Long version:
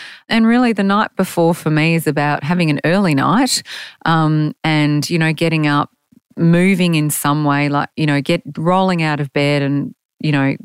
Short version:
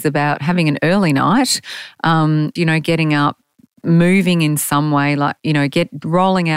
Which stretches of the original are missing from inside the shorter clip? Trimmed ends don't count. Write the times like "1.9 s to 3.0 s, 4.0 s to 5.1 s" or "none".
4.6 s to 5.1 s